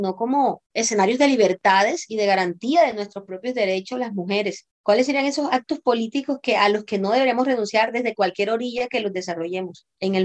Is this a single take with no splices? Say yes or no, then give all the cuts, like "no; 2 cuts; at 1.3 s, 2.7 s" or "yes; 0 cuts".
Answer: yes; 0 cuts